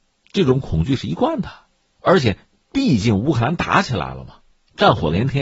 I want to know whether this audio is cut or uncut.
uncut